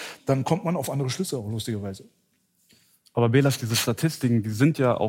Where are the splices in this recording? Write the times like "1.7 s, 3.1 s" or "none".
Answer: none